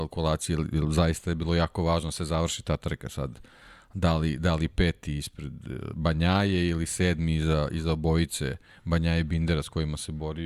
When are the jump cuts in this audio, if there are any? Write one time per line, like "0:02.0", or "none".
none